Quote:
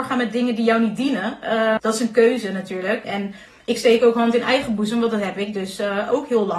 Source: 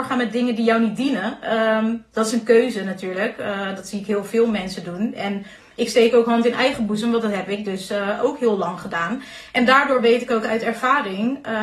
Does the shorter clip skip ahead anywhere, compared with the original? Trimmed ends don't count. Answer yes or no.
yes